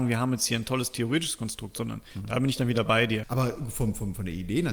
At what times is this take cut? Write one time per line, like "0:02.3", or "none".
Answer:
0:03.2